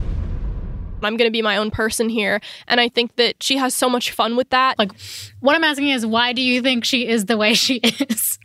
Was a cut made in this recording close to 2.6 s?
no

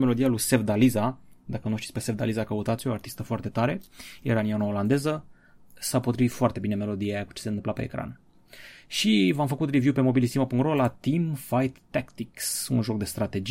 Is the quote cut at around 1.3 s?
no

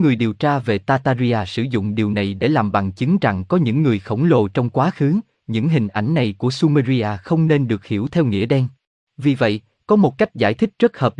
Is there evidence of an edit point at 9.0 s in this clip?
yes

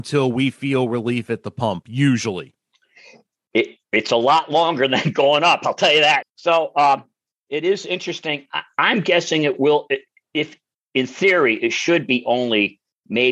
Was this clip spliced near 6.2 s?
yes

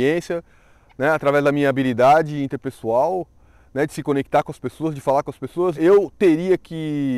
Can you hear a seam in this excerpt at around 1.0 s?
no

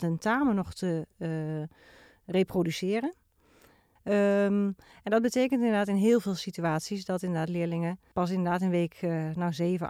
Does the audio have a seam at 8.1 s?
yes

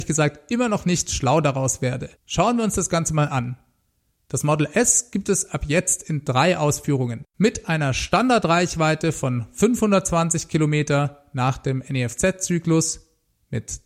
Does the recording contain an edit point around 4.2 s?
no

